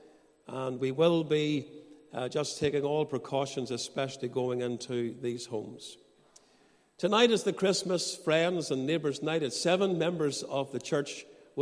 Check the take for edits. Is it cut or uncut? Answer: uncut